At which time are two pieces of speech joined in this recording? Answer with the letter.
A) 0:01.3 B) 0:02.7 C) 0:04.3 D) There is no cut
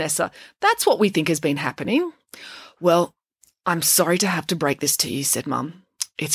D